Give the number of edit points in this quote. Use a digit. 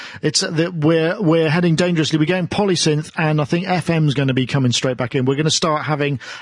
0